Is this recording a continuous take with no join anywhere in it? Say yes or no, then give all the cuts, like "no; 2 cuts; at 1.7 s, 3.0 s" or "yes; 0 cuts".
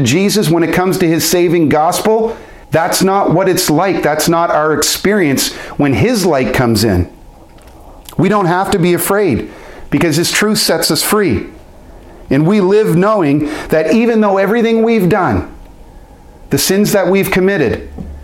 no; 1 cut; at 2.6 s